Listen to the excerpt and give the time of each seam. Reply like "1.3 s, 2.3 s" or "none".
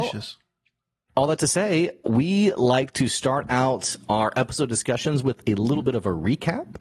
none